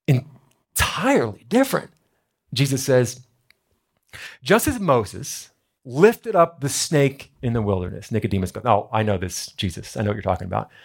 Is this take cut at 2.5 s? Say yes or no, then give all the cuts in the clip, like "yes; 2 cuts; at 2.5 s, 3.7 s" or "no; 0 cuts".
yes; 1 cut; at 2.5 s